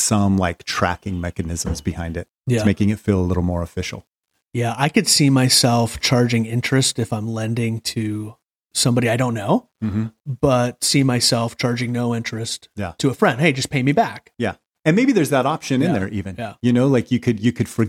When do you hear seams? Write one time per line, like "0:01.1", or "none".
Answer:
none